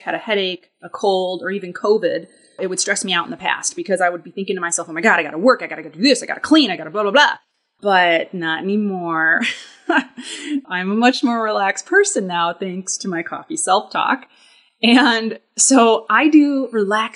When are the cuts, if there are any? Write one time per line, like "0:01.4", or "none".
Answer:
none